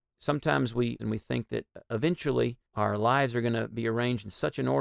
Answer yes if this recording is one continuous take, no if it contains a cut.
no